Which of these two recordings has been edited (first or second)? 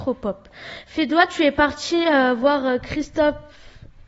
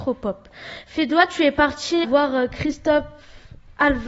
second